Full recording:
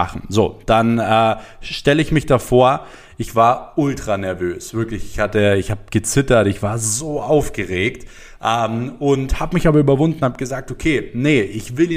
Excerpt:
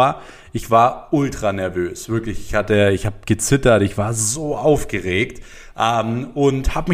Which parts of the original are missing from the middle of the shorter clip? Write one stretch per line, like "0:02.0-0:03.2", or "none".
none